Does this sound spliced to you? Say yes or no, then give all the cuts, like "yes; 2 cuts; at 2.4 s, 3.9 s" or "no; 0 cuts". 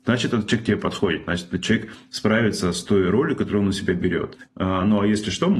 yes; 1 cut; at 4.4 s